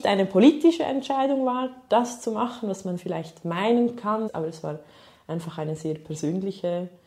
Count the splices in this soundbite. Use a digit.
1